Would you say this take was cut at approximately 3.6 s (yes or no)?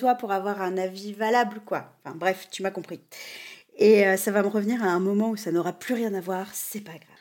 no